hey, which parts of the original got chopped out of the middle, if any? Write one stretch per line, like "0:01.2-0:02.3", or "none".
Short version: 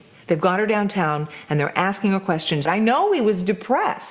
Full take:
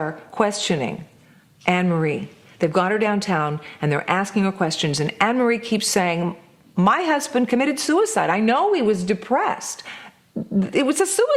0:05.0-0:08.3